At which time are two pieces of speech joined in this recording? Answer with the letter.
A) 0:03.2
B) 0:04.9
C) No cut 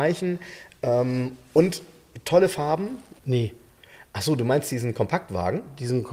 A